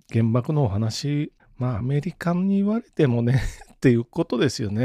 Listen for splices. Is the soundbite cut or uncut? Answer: uncut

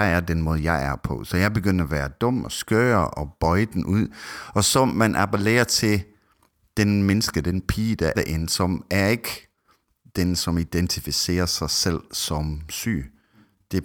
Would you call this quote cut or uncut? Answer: cut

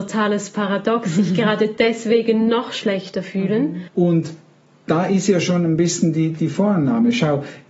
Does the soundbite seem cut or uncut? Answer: cut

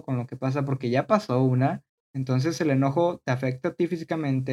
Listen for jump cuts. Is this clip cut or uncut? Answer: cut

